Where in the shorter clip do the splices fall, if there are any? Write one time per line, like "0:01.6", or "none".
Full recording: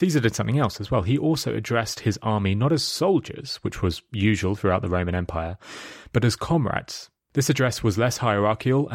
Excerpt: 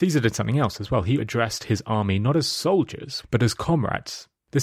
0:01.2
0:03.2